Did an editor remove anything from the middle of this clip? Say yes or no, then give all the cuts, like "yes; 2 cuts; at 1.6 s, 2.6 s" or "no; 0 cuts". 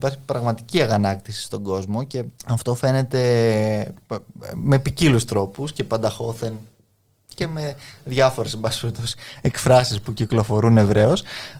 yes; 1 cut; at 2.4 s